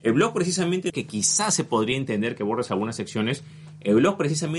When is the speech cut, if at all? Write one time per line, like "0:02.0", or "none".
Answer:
0:00.9